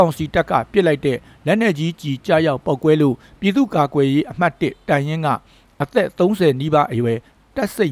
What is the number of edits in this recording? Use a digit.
0